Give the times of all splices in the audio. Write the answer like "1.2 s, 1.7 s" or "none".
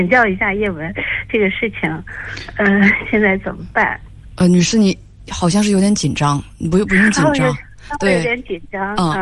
none